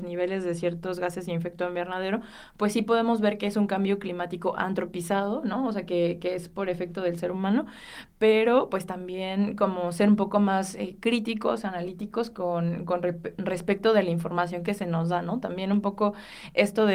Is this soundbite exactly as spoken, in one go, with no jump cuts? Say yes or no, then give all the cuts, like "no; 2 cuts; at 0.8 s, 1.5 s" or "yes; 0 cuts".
yes; 0 cuts